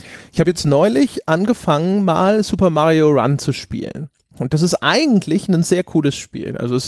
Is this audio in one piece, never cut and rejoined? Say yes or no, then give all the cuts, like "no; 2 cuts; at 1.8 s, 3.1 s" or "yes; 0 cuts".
yes; 0 cuts